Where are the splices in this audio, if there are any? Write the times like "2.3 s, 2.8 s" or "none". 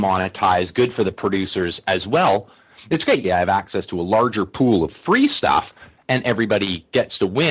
3.2 s